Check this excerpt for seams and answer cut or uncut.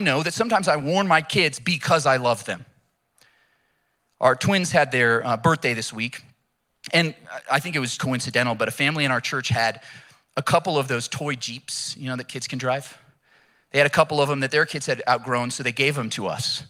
cut